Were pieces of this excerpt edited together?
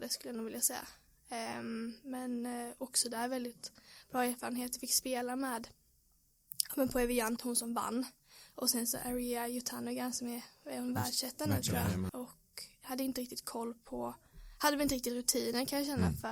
yes; 2 cuts; at 7.4 s, 12.1 s

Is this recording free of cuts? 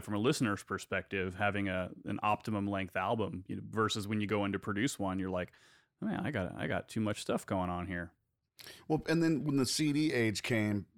yes; 0 cuts

